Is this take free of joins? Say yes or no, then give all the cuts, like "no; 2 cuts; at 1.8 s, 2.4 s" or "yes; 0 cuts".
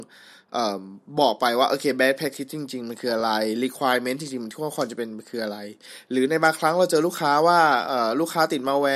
yes; 0 cuts